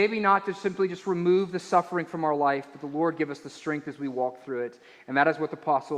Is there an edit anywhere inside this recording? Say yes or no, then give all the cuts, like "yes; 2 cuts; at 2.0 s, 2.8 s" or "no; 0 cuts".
no; 0 cuts